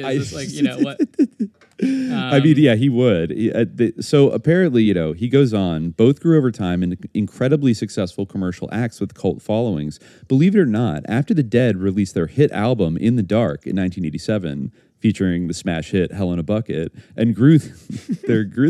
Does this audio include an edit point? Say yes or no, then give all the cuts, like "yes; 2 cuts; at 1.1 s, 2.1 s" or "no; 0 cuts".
no; 0 cuts